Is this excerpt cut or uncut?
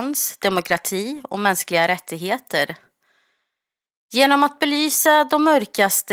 uncut